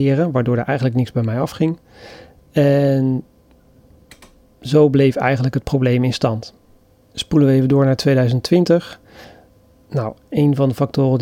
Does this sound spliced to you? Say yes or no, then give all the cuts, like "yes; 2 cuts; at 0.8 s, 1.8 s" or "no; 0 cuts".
no; 0 cuts